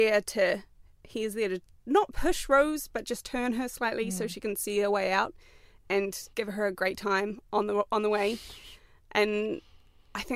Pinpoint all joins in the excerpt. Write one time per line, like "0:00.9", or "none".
0:06.3